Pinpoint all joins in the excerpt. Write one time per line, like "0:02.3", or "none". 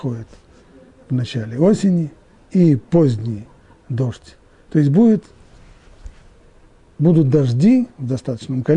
0:04.6

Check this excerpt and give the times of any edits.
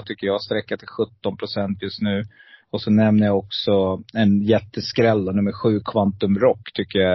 none

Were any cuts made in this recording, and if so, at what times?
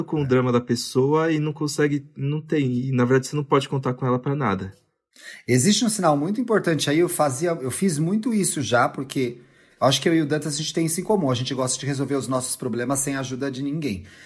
none

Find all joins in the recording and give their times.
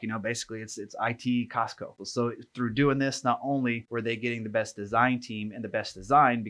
0:02.0

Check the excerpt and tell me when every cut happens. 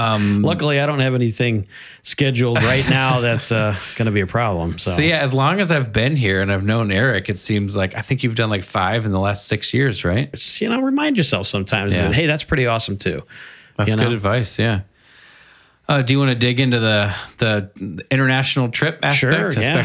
0:10.3

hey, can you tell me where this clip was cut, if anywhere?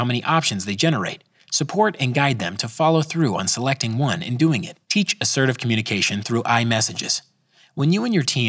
0:04.8

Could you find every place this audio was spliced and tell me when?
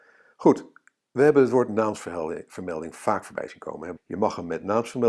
0:04.0

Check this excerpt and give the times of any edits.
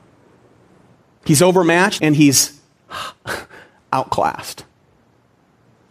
0:02.0

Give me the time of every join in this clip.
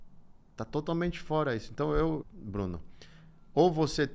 0:02.2

